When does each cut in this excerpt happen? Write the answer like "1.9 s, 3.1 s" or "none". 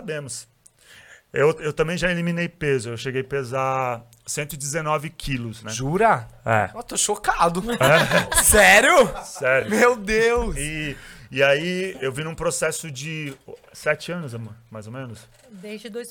none